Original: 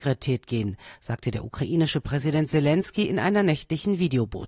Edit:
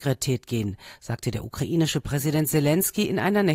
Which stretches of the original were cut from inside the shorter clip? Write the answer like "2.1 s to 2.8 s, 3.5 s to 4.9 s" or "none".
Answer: none